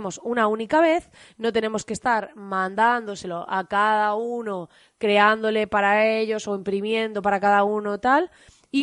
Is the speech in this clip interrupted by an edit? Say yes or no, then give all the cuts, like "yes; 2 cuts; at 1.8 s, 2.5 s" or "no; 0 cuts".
no; 0 cuts